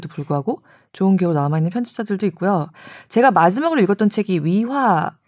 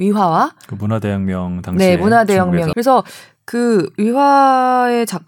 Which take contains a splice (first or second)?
second